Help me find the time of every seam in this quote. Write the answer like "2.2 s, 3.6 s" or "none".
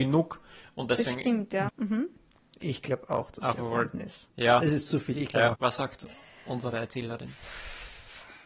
1.7 s, 4.3 s, 5.5 s